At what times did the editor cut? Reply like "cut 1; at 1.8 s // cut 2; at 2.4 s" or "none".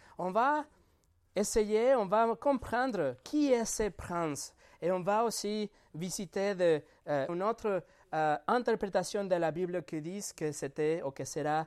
cut 1; at 7.3 s